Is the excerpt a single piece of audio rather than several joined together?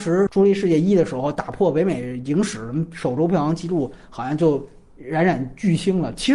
yes; 0 cuts

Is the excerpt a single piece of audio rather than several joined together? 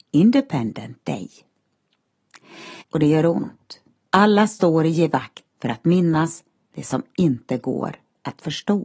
no; 3 cuts; at 2.8 s, 4.1 s, 5.5 s

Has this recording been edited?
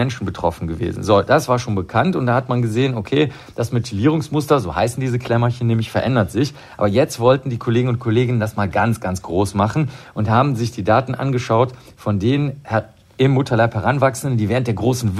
no; 0 cuts

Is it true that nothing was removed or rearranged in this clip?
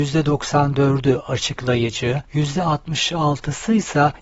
no; 1 cut; at 2.3 s

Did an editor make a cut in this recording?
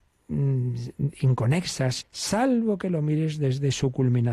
yes; 1 cut; at 2.0 s

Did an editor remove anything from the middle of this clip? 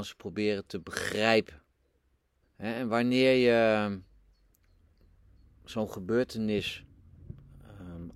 yes; 1 cut; at 2.4 s

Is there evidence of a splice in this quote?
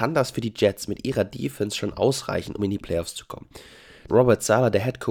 yes; 2 cuts; at 2.6 s, 4.1 s

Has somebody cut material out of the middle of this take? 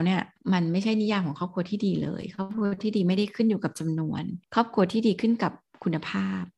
yes; 1 cut; at 4.4 s

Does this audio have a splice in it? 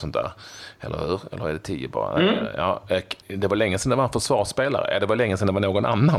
yes; 1 cut; at 3.2 s

